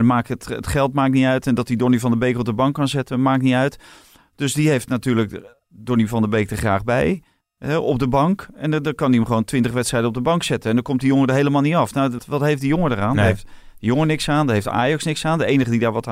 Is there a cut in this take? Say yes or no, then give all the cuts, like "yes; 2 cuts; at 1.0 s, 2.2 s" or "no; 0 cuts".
yes; 1 cut; at 12.2 s